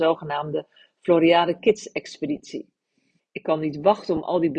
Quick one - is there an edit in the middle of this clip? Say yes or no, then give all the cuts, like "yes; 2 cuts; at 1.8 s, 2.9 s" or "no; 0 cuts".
yes; 1 cut; at 3.2 s